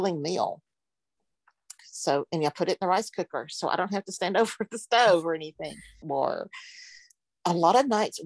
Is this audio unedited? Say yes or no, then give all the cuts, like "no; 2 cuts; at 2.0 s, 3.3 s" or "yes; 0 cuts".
no; 2 cuts; at 1.8 s, 6.0 s